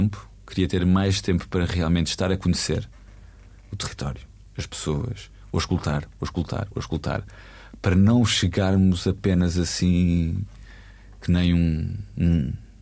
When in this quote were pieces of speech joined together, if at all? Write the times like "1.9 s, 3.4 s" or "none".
none